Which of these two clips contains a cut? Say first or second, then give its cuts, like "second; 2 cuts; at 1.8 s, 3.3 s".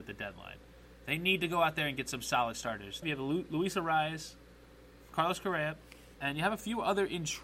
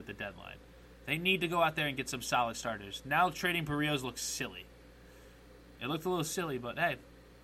first; 2 cuts; at 3.0 s, 6.2 s